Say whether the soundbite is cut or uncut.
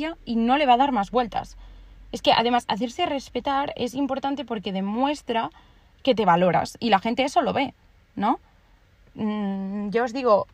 uncut